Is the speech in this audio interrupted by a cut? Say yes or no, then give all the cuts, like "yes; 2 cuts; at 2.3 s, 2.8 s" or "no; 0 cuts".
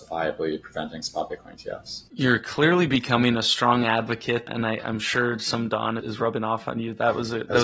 yes; 3 cuts; at 2.1 s, 4.5 s, 6.0 s